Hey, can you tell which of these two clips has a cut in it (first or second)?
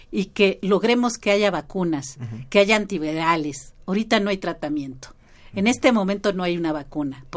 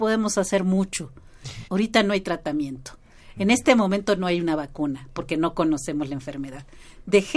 second